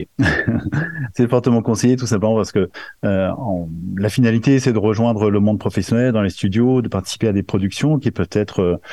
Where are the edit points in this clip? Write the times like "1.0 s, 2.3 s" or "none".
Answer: none

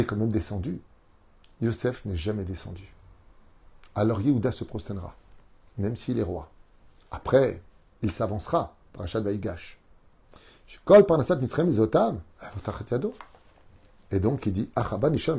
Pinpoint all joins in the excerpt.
none

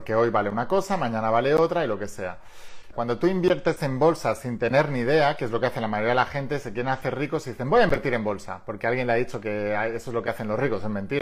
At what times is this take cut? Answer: 2.9 s

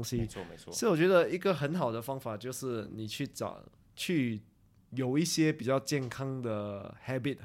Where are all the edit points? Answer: none

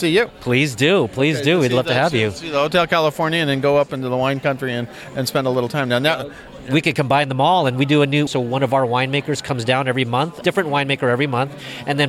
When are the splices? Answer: 8.3 s, 10.4 s

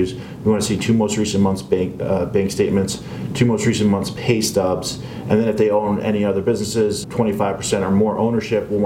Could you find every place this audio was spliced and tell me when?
7.0 s

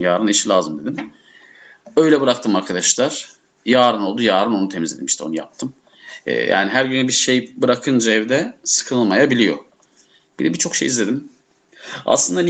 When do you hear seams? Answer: none

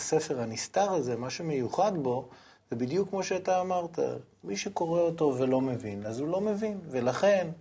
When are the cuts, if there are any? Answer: none

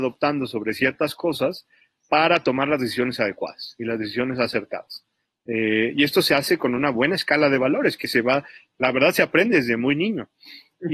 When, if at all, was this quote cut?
none

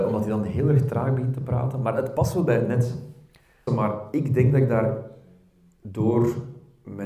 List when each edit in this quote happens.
3.7 s

